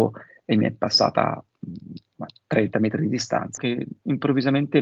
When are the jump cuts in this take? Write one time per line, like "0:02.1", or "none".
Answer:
0:03.6

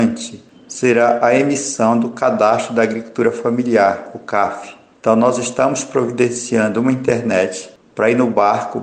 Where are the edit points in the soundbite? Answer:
none

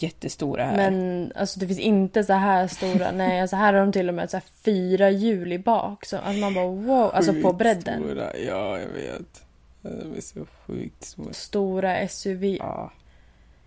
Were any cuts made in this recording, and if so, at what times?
0:11.3
0:12.6

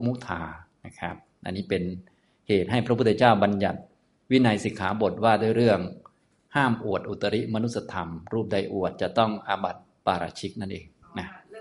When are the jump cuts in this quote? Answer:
none

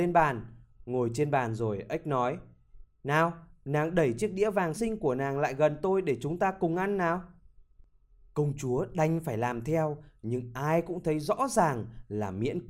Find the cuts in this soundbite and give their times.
0:04.8

